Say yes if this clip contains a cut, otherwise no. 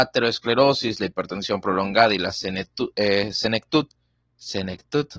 no